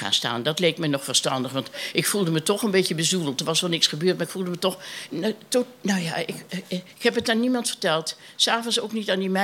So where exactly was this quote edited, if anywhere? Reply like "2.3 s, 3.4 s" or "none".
none